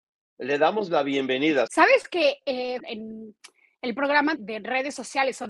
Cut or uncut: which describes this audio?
cut